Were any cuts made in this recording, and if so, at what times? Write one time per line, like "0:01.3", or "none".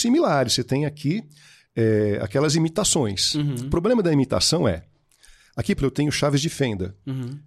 0:05.8